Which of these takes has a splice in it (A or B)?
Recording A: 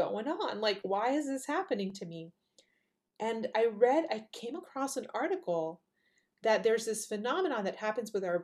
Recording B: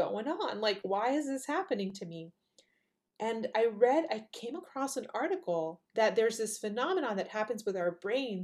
B